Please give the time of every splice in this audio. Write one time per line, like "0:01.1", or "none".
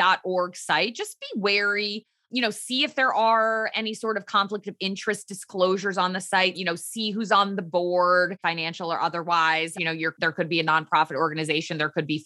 0:06.5
0:08.4
0:09.7